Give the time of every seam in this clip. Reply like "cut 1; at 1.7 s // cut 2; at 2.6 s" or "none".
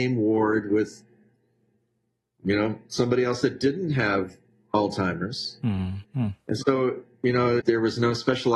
cut 1; at 6.0 s // cut 2; at 7.6 s